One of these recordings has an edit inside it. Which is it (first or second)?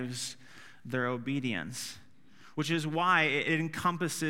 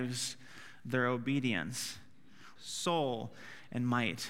second